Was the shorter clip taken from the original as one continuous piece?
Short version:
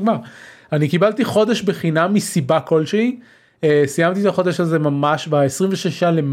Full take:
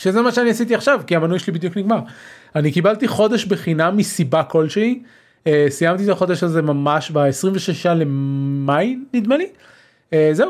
yes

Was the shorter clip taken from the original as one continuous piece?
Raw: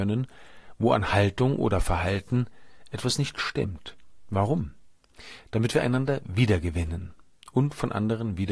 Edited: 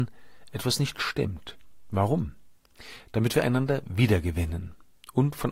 yes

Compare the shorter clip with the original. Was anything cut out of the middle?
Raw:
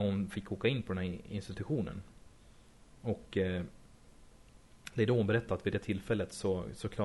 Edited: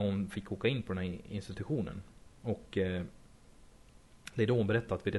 yes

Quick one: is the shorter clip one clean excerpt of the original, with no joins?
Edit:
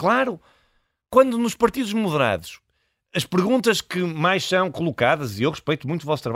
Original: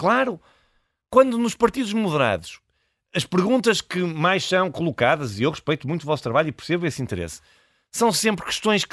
yes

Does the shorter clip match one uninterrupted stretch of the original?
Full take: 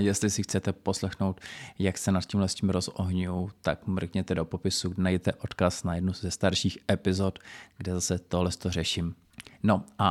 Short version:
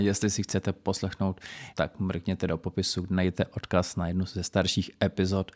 no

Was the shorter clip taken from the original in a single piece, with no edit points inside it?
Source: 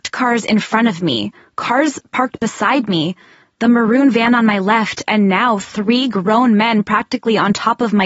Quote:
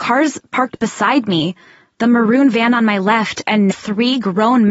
no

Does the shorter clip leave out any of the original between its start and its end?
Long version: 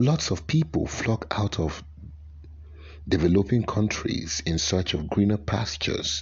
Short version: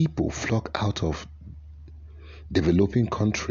no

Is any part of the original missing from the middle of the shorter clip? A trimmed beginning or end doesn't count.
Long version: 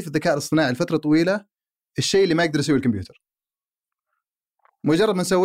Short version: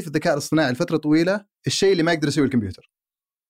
yes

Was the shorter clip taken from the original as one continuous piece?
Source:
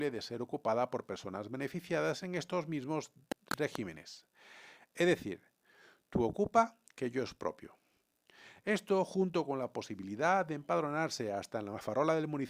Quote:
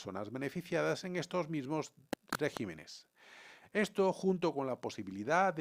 no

